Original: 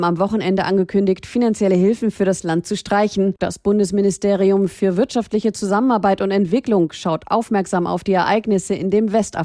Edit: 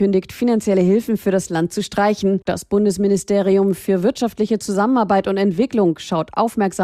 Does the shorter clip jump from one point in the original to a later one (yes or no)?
no